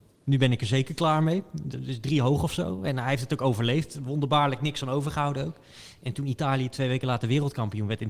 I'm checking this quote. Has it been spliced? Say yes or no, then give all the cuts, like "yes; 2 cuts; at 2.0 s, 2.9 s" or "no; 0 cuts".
no; 0 cuts